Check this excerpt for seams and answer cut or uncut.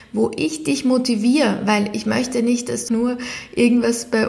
cut